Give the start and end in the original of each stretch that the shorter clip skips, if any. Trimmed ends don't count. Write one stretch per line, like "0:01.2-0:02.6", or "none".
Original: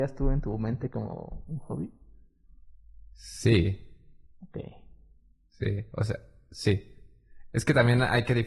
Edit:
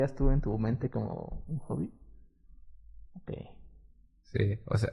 0:03.1-0:04.3